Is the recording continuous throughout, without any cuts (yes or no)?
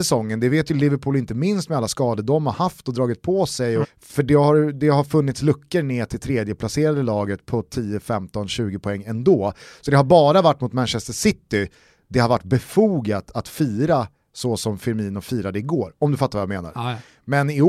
no